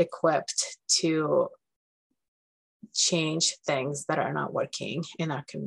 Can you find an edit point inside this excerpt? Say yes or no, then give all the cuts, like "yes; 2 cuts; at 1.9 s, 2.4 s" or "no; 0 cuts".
no; 0 cuts